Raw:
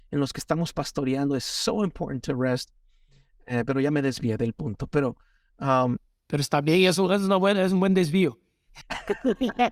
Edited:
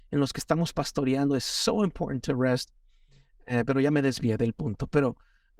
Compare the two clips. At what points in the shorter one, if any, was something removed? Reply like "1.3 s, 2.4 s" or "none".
none